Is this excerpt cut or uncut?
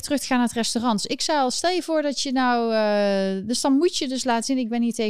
uncut